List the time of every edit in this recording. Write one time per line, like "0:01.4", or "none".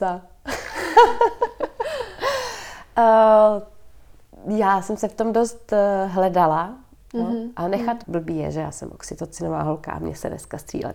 0:07.0
0:08.0